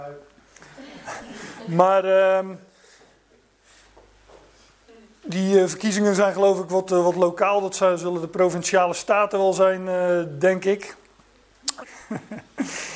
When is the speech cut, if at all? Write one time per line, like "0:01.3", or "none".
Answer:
0:11.8